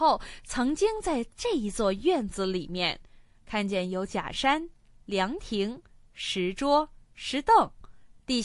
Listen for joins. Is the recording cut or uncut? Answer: uncut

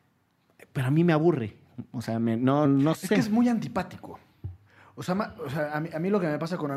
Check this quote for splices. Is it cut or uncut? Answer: cut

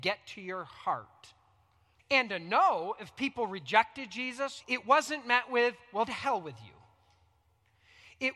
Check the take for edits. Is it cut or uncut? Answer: cut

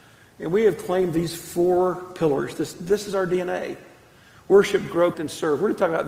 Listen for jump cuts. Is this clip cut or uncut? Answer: cut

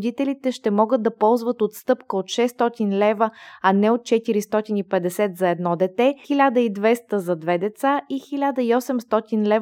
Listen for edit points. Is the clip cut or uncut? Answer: cut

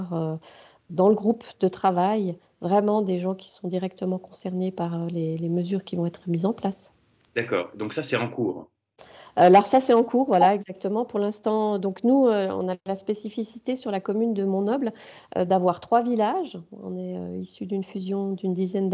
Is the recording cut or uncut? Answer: uncut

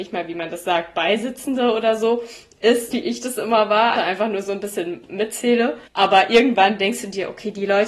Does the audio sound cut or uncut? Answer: cut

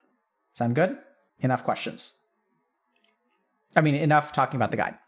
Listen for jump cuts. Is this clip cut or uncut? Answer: cut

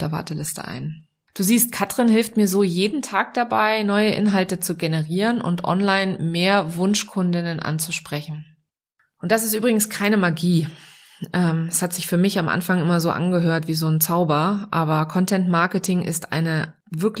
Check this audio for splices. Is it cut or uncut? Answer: uncut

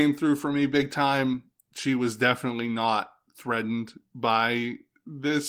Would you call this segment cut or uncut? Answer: uncut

